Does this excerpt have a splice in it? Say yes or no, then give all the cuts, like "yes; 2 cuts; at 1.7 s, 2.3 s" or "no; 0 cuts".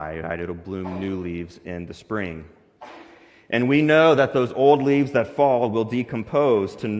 no; 0 cuts